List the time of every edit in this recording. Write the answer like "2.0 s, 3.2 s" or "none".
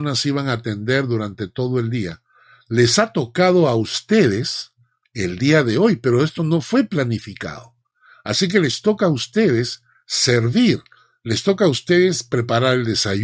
none